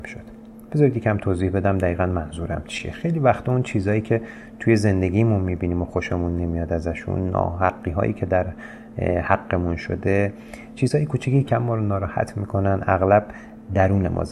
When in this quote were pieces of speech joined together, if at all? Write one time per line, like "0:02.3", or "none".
0:11.4